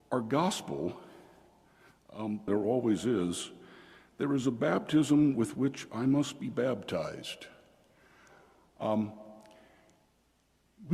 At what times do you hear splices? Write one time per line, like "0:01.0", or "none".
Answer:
0:02.5